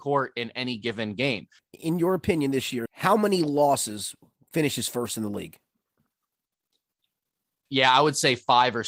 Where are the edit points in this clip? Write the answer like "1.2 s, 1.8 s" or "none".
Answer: 1.6 s, 2.9 s, 7.7 s